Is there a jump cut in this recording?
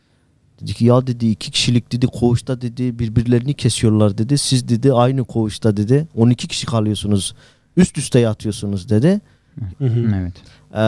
yes; 1 cut; at 9.7 s

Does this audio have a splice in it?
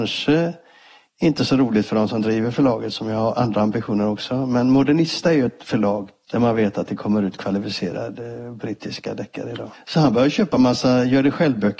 yes; 2 cuts; at 6.3 s, 9.7 s

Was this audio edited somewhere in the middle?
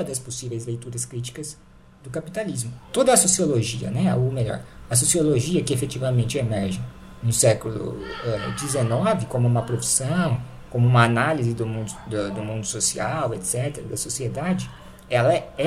no; 0 cuts

